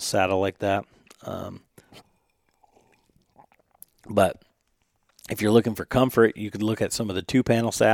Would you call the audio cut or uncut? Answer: uncut